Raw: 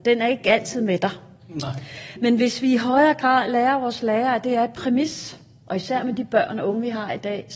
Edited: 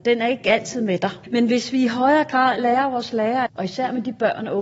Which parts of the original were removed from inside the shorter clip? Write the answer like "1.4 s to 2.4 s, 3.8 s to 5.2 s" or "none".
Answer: 1.2 s to 2.1 s, 4.4 s to 5.6 s